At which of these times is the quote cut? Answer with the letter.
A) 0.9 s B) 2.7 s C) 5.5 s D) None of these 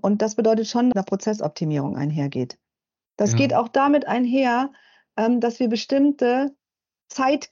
A